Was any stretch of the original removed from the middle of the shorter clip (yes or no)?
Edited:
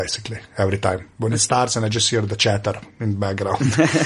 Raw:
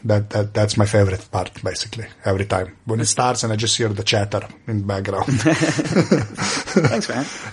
no